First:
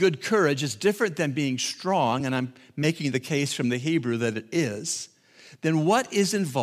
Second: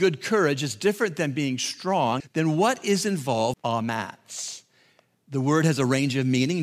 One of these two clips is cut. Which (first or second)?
second